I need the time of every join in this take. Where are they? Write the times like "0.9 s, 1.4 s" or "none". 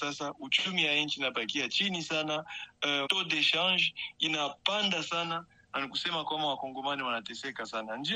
3.1 s